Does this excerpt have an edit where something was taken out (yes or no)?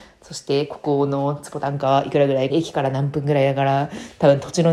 yes